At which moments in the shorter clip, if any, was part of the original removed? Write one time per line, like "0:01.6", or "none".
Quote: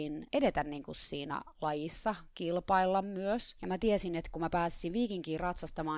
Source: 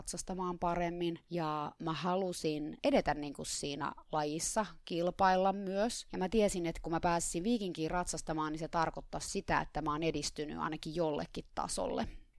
none